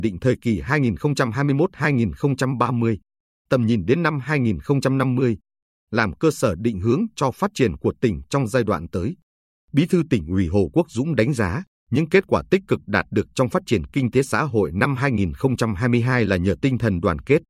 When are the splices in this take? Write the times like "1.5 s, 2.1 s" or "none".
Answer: none